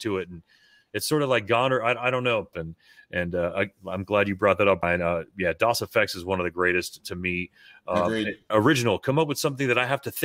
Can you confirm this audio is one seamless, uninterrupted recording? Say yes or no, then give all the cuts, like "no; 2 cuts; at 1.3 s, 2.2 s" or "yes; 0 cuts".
no; 2 cuts; at 2.5 s, 8.5 s